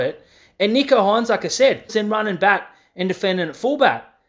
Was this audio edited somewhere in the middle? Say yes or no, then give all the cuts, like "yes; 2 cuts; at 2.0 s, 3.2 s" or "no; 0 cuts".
yes; 1 cut; at 1.9 s